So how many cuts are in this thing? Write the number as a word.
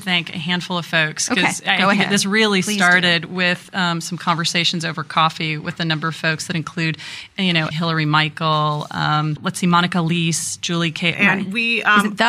two